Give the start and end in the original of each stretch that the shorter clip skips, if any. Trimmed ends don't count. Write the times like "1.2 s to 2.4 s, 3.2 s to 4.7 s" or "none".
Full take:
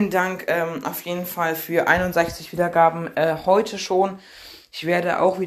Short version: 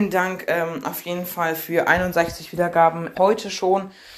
3.1 s to 3.4 s